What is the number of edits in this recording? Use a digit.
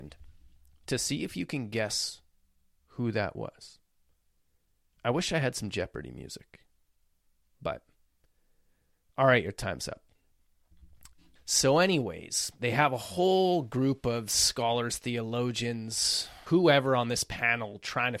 2